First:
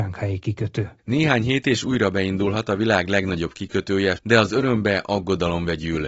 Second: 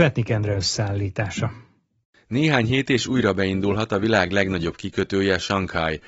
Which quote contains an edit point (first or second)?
first